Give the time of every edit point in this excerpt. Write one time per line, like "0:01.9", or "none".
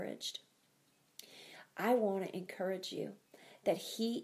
none

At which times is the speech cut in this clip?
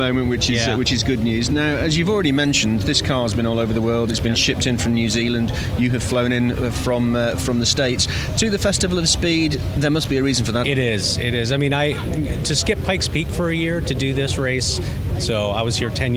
0:10.6
0:12.4
0:15.1

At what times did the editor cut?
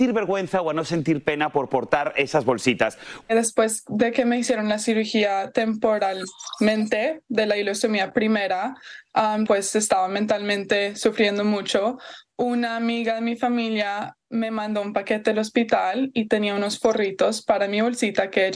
0:03.2
0:09.5

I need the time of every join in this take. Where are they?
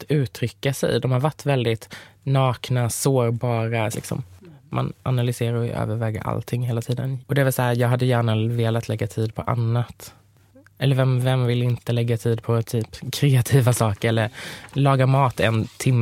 0:03.9
0:07.2

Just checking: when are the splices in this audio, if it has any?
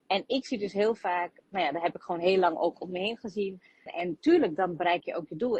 0:03.9

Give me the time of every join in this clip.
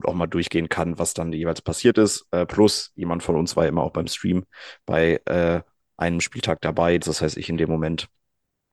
0:07.0

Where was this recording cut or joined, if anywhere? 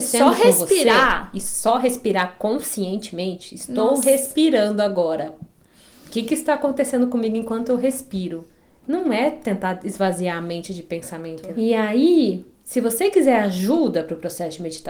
none

